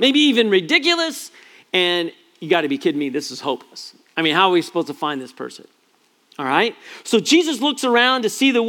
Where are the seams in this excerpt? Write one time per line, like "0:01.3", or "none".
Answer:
none